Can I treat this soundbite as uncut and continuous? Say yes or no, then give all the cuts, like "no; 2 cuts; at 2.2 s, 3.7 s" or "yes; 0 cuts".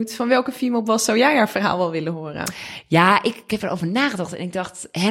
yes; 0 cuts